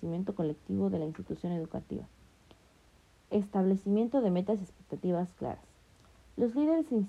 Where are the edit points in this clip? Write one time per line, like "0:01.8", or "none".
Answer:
none